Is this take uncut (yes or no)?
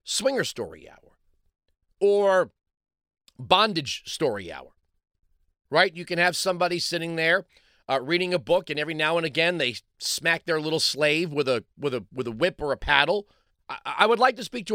no